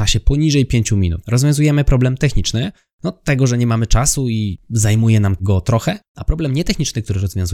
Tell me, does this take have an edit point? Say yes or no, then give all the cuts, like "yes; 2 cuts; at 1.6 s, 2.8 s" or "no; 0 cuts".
yes; 2 cuts; at 1.2 s, 6.0 s